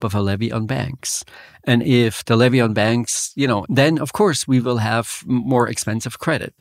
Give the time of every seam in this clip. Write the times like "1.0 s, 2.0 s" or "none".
3.6 s